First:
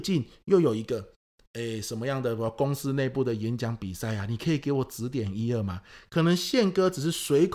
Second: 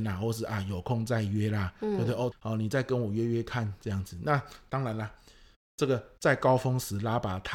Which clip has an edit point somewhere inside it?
second; 1 cut; at 2.3 s

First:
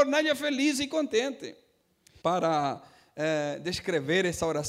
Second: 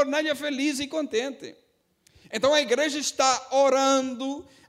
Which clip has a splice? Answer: first; 1 cut; at 2.2 s

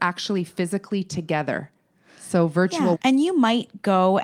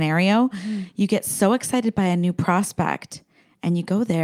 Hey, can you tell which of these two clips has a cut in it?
first; 1 cut; at 3.0 s

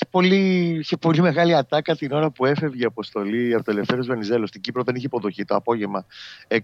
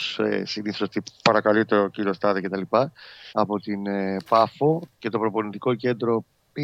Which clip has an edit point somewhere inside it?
second; 1 cut; at 3.3 s

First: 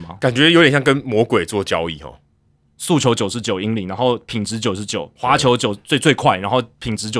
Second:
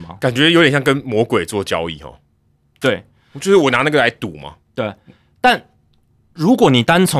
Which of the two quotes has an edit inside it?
first; 1 cut; at 2.7 s

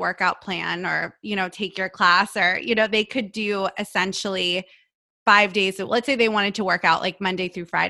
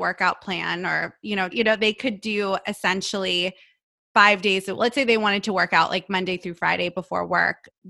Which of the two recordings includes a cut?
second; 1 cut; at 1.5 s

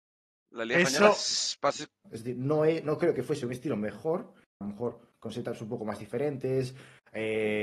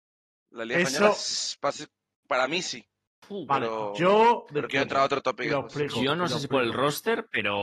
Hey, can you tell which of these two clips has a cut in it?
first; 2 cuts; at 2.0 s, 4.6 s

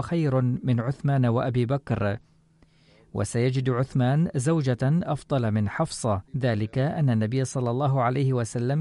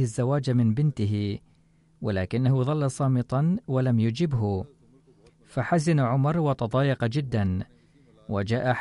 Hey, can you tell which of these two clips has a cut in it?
first; 1 cut; at 6.3 s

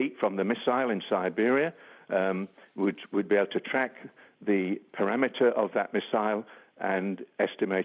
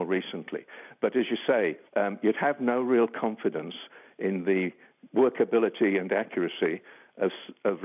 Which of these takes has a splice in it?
second; 1 cut; at 1.9 s

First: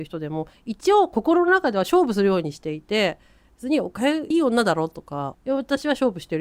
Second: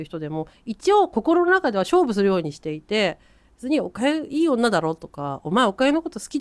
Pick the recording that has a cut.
first; 2 cuts; at 4.3 s, 5.3 s

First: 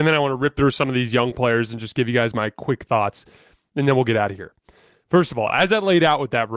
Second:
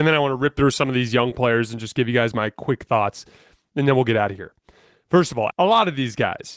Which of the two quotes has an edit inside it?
second; 1 cut; at 5.5 s

